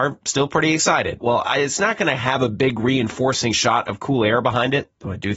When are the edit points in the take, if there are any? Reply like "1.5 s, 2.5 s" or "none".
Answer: 1.2 s